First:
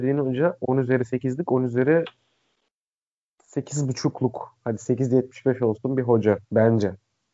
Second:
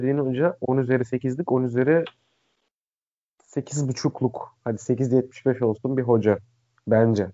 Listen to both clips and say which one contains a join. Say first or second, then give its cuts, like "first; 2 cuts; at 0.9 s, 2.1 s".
first; 1 cut; at 6.4 s